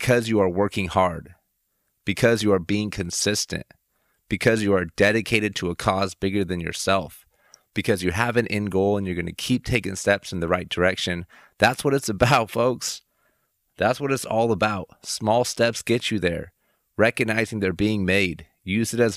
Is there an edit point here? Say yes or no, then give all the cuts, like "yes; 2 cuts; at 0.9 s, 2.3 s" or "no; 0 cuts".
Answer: no; 0 cuts